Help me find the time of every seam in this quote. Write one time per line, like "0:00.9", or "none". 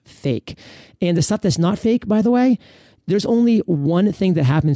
none